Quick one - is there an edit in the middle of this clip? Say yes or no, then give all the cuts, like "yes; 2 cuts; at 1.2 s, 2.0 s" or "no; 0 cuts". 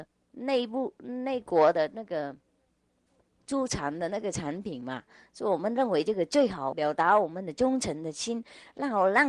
yes; 1 cut; at 6.7 s